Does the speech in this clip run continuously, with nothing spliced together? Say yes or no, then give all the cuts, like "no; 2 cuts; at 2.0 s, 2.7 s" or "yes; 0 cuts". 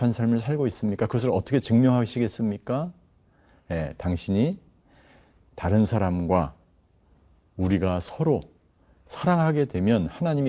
yes; 0 cuts